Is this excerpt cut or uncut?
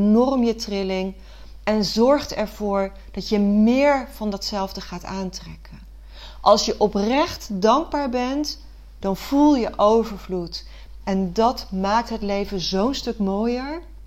cut